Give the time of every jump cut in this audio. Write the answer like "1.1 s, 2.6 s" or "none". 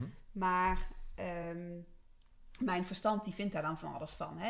none

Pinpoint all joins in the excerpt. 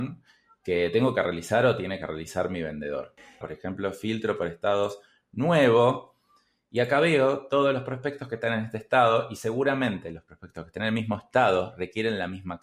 3.4 s

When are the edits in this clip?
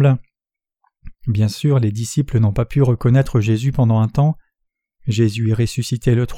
1.1 s, 5.0 s

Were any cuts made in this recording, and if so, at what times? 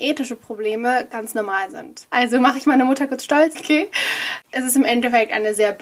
2.1 s, 3.5 s

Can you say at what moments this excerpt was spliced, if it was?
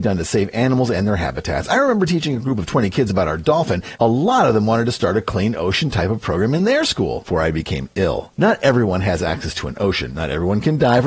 4.0 s, 7.3 s, 8.3 s

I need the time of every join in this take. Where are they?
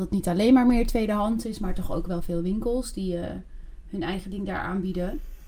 none

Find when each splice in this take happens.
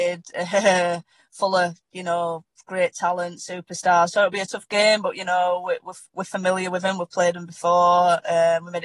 none

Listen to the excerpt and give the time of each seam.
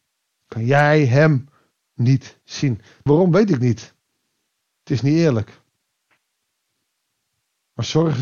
3.1 s

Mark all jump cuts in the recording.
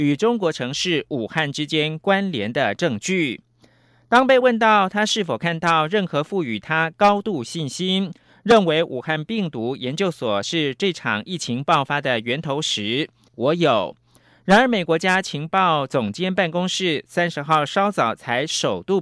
13.3 s, 14.9 s

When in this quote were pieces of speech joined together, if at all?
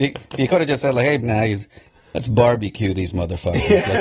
1.2 s

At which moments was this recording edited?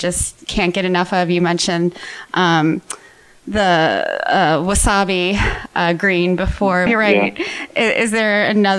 6.9 s

